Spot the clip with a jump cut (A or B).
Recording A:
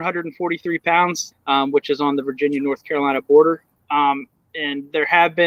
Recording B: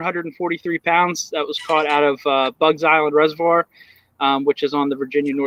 A